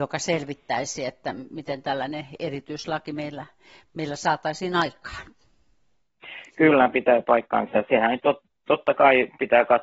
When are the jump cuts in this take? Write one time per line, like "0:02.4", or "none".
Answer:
none